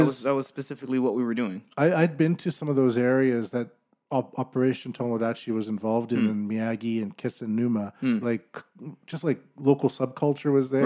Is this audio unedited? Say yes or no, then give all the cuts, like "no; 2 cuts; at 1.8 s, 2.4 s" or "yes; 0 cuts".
no; 1 cut; at 8.2 s